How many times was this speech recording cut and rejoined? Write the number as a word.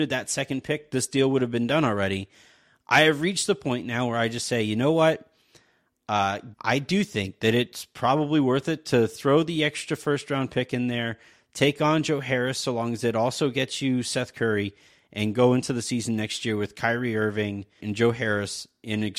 two